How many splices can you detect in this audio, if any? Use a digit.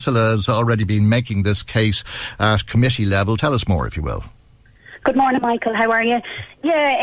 0